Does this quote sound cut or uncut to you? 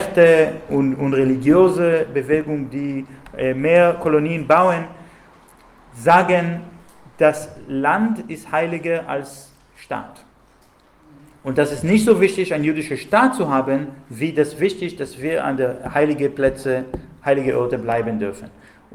uncut